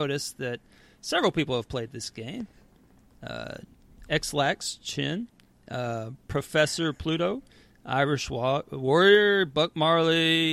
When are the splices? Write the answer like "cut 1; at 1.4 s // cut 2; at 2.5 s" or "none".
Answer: none

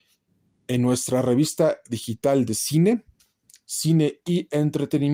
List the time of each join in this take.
none

